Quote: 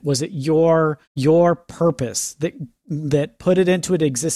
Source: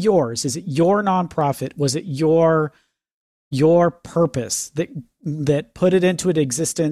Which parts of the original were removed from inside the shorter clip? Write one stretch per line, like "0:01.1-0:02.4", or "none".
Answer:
0:02.8-0:03.4